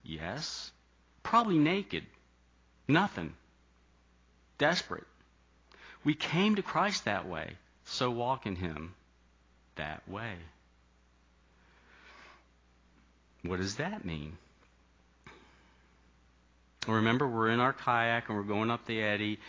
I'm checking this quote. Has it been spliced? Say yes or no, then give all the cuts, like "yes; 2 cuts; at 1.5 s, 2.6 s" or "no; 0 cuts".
no; 0 cuts